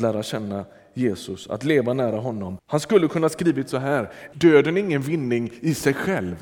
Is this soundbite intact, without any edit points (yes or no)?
no